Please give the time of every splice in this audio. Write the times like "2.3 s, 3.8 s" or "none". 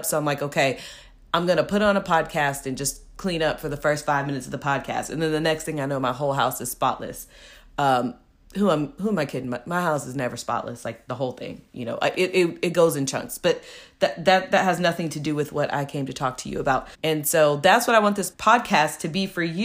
16.9 s, 18.3 s